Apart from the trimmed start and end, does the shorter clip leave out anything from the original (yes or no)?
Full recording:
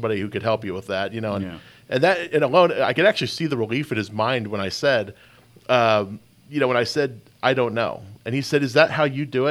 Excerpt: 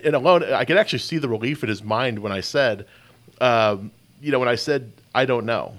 no